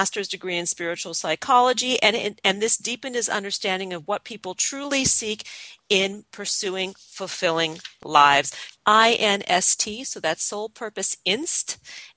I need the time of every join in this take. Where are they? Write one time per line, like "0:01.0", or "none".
0:08.7